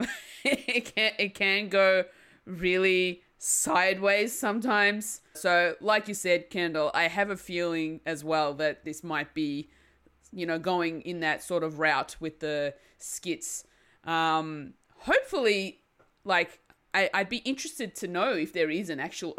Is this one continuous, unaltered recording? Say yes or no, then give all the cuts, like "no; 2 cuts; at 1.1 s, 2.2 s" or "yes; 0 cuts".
no; 1 cut; at 5.3 s